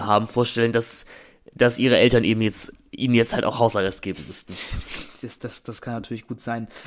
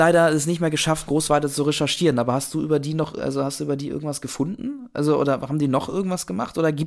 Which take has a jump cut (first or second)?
second